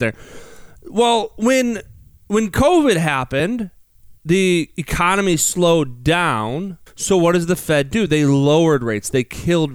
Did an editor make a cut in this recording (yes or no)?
yes